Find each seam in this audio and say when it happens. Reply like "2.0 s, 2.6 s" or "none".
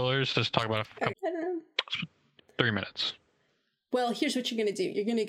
1.1 s, 2.4 s

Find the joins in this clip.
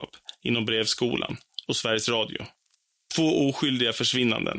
none

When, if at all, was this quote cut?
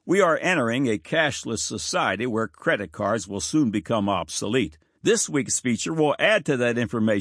4.9 s

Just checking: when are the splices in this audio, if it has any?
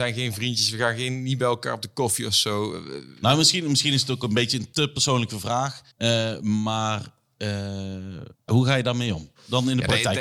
5.9 s, 8.3 s

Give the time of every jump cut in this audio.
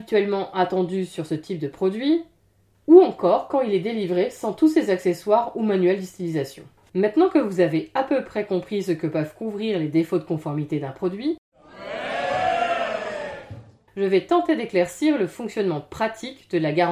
2.7 s, 6.9 s

